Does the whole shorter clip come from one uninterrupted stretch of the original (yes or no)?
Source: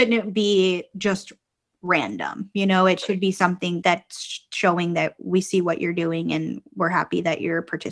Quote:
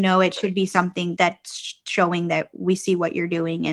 yes